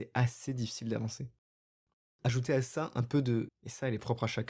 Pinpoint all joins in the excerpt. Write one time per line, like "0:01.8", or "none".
0:03.5

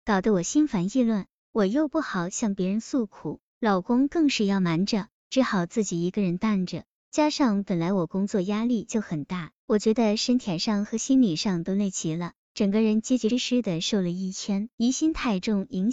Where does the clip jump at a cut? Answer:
0:09.6
0:13.3
0:14.7

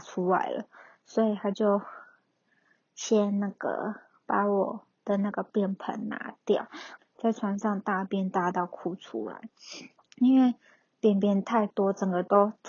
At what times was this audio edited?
0:07.0
0:09.9

